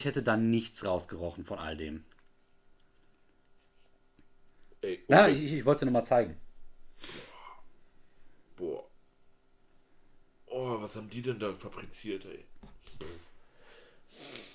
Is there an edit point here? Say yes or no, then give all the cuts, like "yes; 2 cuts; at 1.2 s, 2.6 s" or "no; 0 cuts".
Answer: yes; 1 cut; at 5.1 s